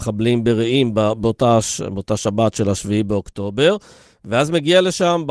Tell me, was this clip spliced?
no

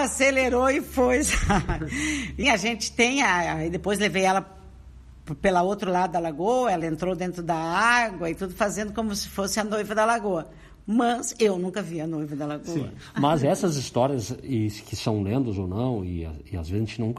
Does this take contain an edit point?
yes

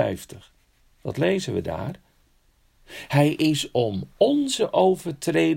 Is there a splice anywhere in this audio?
no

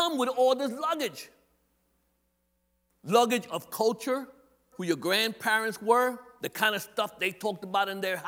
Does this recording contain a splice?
yes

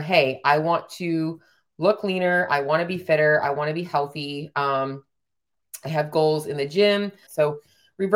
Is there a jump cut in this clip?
yes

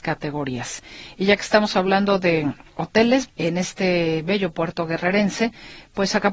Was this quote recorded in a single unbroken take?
no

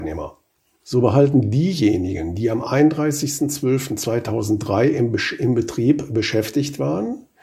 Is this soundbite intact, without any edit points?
yes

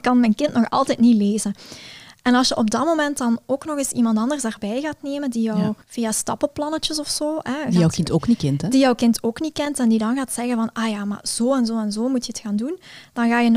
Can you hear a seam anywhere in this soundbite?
yes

